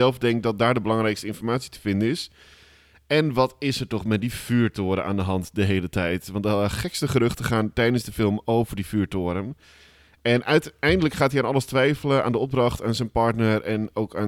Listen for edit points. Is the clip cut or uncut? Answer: uncut